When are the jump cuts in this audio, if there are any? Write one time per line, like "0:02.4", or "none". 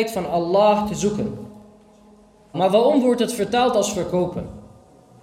0:02.5